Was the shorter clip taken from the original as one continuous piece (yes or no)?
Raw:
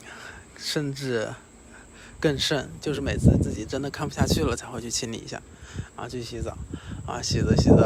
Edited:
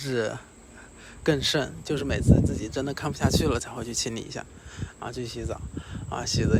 yes